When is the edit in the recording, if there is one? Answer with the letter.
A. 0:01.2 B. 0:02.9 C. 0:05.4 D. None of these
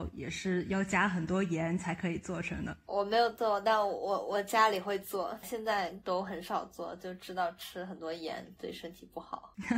B